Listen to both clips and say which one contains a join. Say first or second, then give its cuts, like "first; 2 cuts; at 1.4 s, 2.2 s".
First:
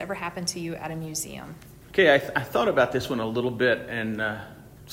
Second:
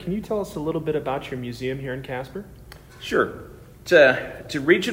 first; 1 cut; at 1.8 s